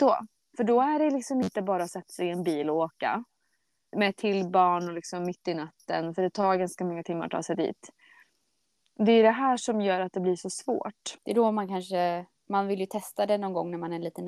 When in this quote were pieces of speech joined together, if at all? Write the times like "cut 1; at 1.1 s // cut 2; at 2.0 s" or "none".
cut 1; at 3.9 s // cut 2; at 11.2 s

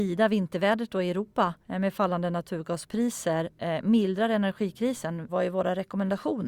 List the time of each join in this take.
cut 1; at 1.6 s // cut 2; at 5.3 s

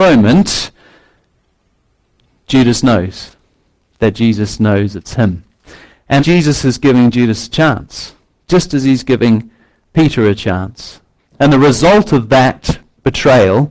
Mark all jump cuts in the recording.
cut 1; at 6.2 s // cut 2; at 11.2 s

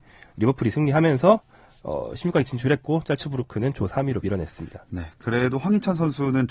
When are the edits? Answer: none

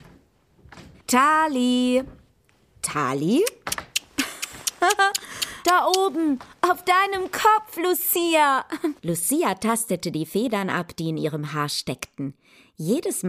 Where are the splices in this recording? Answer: cut 1; at 1.0 s // cut 2; at 9.0 s

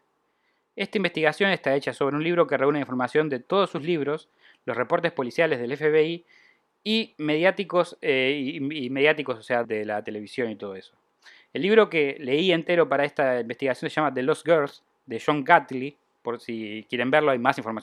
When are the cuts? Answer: cut 1; at 9.6 s

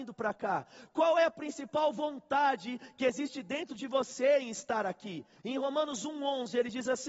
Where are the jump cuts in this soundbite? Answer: cut 1; at 0.9 s // cut 2; at 5.4 s

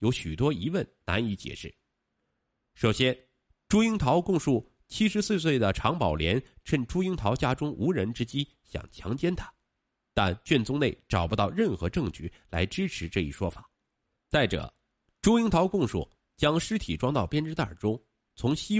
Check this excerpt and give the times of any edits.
cut 1; at 14.2 s // cut 2; at 16.2 s

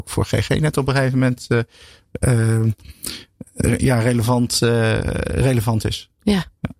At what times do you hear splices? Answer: none

